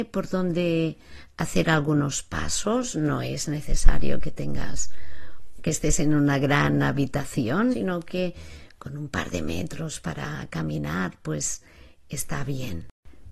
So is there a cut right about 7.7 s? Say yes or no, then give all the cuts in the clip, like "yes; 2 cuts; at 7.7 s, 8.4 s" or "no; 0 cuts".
yes; 1 cut; at 7.7 s